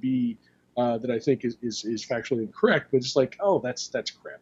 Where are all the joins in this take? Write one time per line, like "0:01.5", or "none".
none